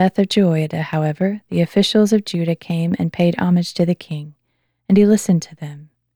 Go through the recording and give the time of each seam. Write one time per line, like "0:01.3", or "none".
none